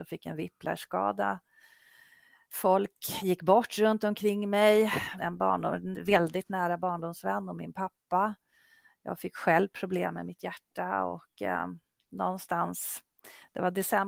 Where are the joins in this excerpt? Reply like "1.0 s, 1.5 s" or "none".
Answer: 5.2 s